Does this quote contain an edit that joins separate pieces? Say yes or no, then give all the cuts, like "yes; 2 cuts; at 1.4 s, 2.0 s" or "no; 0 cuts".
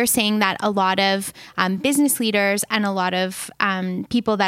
no; 0 cuts